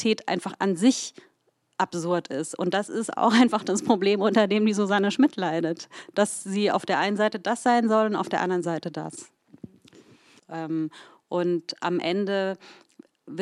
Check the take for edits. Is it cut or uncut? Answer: cut